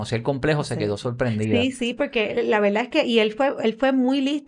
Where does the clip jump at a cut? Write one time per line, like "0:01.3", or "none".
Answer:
none